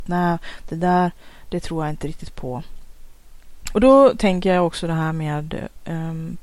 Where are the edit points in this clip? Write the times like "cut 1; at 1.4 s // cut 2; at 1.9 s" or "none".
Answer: cut 1; at 3.7 s

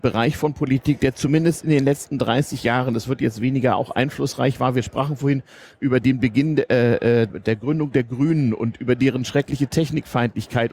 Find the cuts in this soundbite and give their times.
cut 1; at 7.3 s

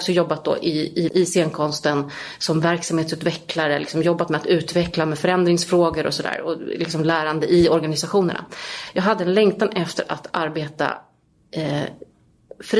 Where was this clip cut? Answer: cut 1; at 1.1 s

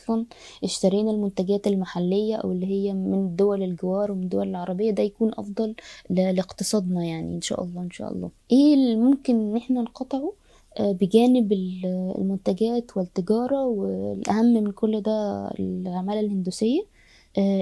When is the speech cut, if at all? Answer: cut 1; at 8.4 s

